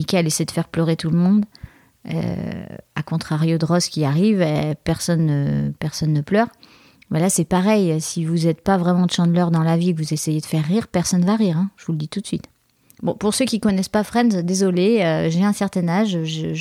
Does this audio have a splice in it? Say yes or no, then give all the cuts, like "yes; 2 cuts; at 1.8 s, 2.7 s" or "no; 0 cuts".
no; 0 cuts